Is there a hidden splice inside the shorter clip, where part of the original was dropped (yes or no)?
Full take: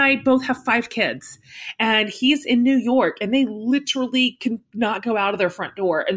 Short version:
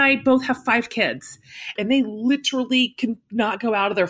yes